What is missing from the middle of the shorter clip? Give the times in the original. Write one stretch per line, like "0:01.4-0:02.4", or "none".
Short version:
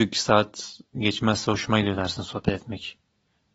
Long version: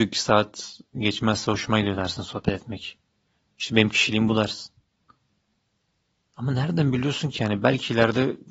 none

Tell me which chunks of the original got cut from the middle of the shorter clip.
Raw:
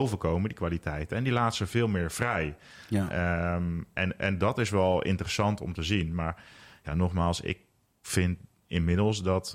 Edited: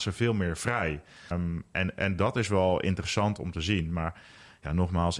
0:02.8-0:03.5

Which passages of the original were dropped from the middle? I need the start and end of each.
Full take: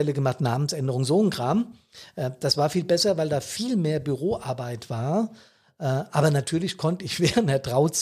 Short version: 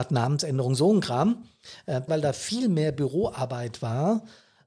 0:02.4-0:03.2

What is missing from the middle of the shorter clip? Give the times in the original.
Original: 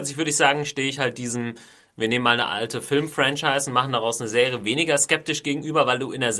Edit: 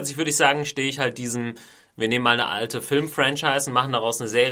none

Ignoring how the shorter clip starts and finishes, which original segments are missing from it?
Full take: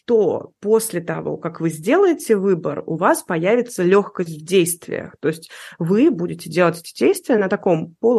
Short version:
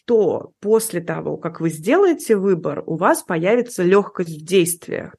none

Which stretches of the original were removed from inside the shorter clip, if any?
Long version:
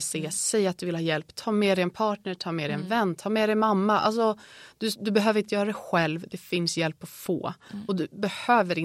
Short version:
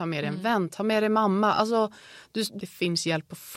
0:05.0-0:06.3

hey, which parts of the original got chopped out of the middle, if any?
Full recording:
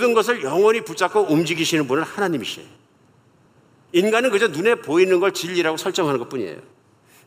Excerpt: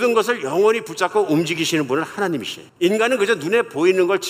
0:02.7-0:03.8

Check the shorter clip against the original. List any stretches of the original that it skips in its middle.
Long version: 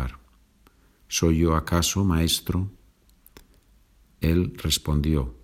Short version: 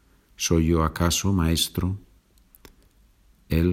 none

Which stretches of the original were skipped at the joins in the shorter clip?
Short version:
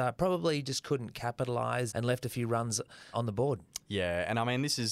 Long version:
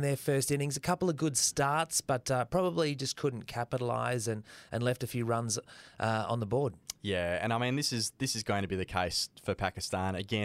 0:04.2-0:04.7
0:05.9-0:06.3

